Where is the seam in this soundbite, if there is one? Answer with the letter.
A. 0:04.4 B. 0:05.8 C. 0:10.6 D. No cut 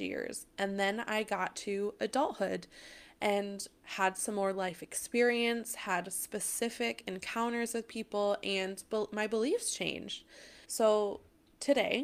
C